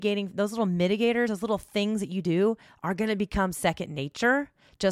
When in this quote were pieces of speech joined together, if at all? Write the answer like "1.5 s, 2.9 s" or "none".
none